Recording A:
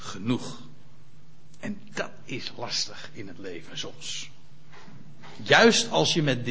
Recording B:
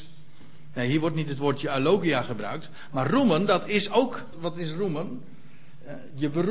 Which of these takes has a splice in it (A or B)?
B